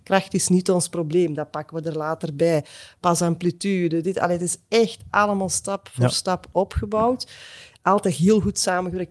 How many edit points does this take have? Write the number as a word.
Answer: zero